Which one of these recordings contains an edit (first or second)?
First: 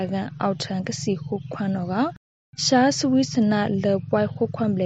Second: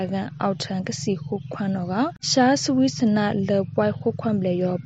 second